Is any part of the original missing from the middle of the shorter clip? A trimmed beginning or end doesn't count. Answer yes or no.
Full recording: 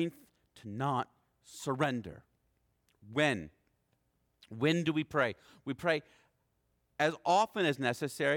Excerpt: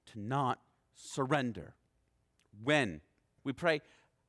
yes